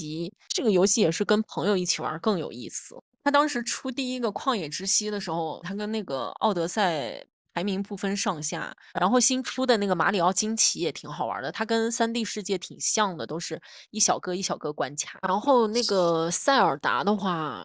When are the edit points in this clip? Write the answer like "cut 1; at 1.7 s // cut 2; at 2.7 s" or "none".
cut 1; at 3.2 s // cut 2; at 5.6 s // cut 3; at 8.9 s